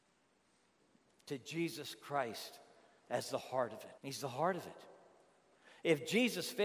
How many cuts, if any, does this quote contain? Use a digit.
1